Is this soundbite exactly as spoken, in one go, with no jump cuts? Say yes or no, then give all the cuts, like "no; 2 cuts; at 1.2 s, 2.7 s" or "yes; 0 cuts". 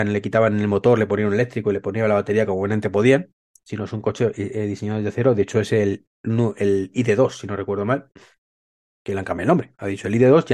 yes; 0 cuts